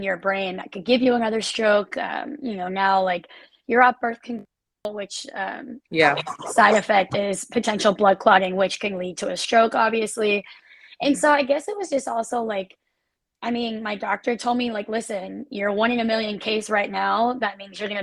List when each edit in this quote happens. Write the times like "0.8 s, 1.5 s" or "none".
5.9 s